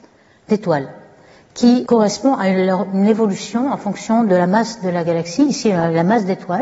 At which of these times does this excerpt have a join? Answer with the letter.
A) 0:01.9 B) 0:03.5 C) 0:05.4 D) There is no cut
A